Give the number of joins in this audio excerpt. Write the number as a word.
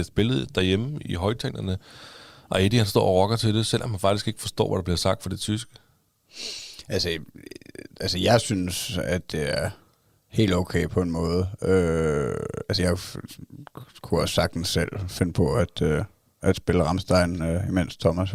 one